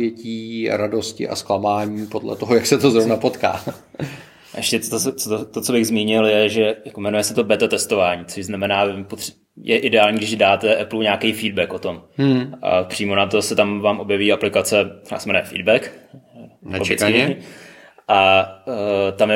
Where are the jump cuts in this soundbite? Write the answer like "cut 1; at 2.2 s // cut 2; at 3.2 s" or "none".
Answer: none